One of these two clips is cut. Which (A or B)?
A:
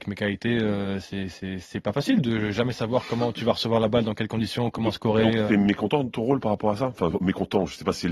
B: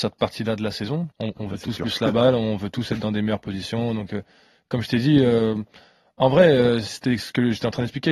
B